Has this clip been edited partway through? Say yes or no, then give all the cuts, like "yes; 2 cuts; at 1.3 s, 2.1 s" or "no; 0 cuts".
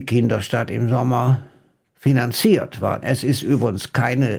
yes; 1 cut; at 3.0 s